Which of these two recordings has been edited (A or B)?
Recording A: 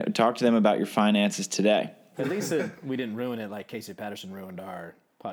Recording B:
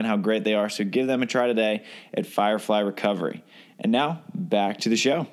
A